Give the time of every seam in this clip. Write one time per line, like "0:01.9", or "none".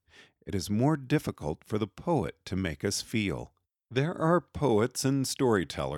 none